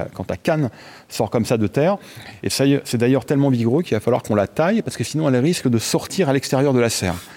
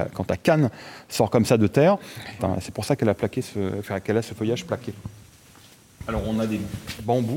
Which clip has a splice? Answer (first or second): second